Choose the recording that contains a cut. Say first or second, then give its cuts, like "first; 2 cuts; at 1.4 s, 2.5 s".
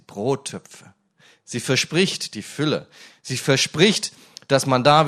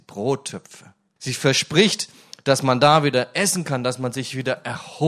second; 1 cut; at 1.2 s